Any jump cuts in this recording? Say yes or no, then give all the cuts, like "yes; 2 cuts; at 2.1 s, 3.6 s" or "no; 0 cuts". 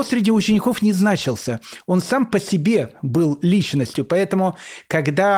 no; 0 cuts